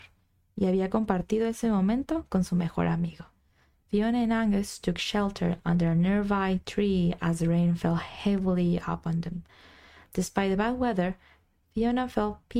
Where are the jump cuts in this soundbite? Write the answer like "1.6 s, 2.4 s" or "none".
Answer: 3.8 s